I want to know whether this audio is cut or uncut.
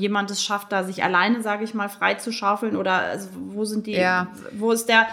uncut